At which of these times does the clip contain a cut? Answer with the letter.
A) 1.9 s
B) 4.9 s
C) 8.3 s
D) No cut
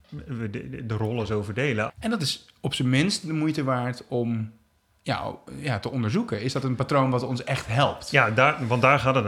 A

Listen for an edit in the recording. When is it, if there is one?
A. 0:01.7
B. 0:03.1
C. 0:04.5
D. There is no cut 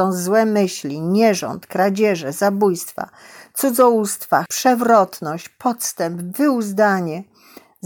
C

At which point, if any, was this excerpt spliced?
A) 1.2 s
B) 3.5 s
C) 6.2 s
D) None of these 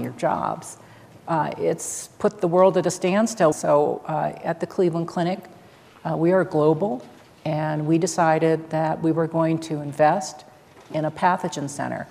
B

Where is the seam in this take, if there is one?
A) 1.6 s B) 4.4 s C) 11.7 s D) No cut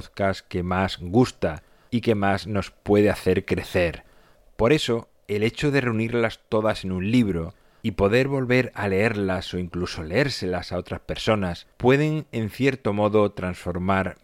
C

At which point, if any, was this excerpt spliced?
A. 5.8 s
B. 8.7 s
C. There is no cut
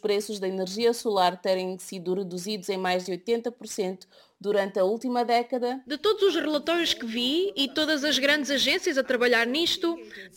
A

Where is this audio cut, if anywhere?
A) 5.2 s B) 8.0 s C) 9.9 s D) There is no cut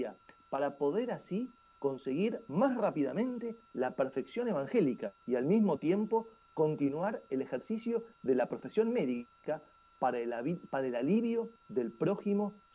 A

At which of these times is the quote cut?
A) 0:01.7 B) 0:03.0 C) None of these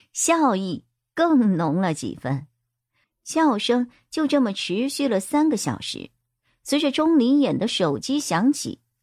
B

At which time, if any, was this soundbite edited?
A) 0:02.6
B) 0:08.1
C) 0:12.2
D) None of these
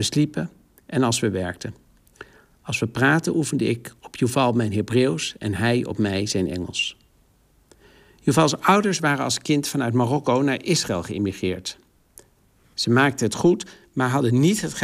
D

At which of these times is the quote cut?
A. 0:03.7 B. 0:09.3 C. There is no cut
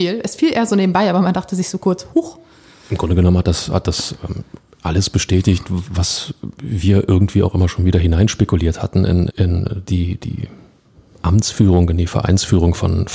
B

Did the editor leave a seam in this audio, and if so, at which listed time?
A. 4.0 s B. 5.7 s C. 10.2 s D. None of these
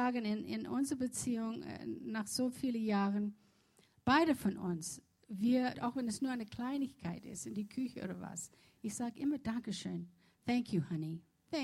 B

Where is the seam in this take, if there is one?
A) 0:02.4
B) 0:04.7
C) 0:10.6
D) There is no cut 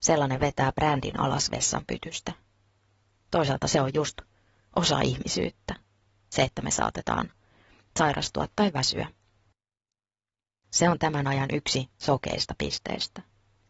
C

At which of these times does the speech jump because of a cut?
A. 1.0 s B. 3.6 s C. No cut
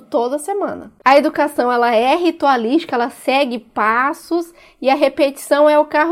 A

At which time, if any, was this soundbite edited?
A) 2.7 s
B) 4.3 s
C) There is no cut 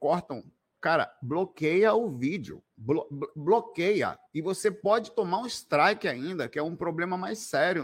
B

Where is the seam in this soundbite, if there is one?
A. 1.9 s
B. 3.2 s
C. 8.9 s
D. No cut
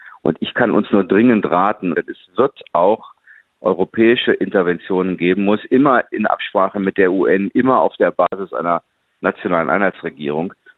A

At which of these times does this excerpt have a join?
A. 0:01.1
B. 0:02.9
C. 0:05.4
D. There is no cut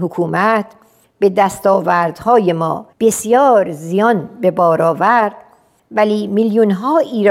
B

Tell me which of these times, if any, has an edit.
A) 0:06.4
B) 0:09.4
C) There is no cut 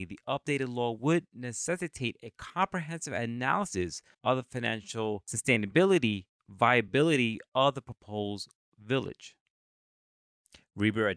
A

